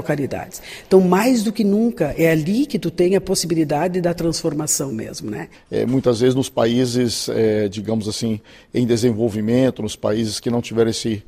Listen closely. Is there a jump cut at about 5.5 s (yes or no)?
yes